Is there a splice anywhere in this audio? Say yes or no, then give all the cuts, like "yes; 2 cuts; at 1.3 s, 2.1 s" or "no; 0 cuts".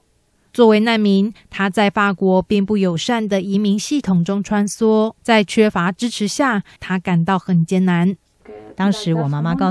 yes; 3 cuts; at 5.2 s, 6.8 s, 8.4 s